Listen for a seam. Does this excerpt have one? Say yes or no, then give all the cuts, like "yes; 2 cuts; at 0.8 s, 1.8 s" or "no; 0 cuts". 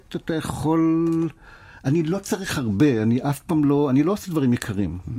no; 0 cuts